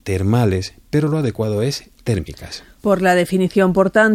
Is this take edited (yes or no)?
yes